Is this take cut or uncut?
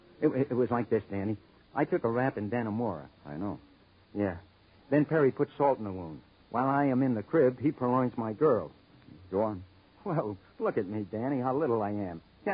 uncut